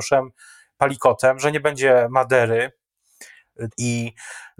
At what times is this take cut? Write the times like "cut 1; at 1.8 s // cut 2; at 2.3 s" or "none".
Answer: cut 1; at 3.7 s